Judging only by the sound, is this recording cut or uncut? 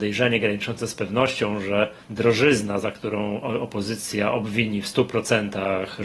cut